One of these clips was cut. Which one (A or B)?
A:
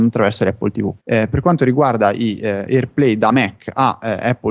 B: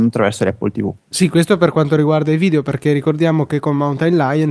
A